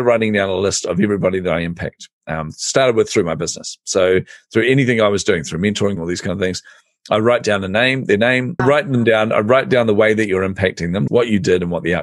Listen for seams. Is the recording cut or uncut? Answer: cut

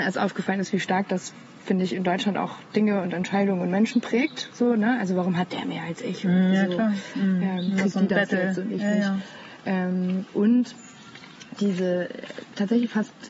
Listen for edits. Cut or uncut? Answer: uncut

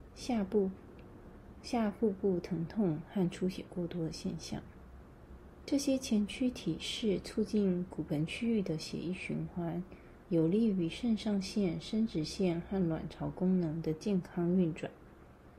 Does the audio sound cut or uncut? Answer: uncut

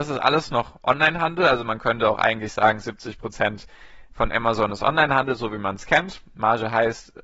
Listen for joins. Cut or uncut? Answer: cut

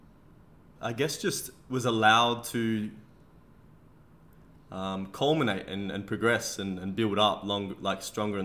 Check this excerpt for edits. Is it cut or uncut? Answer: uncut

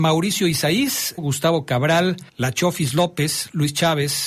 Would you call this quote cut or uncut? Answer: cut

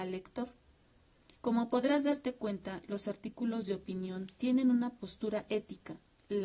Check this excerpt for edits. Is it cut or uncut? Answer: cut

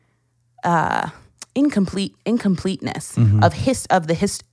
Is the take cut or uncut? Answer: uncut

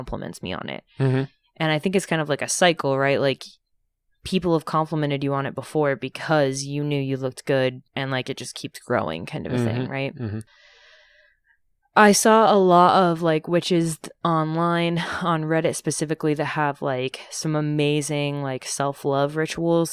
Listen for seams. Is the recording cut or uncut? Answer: cut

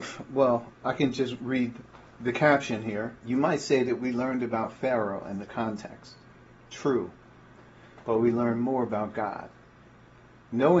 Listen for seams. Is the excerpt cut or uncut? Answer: cut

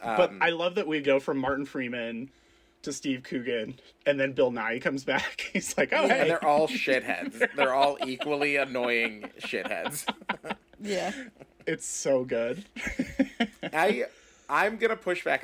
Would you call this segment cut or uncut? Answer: uncut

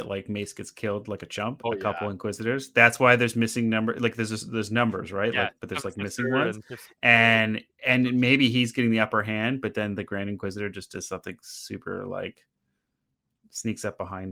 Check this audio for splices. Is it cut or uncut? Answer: cut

